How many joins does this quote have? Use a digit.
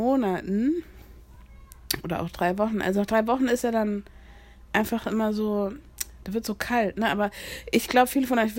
0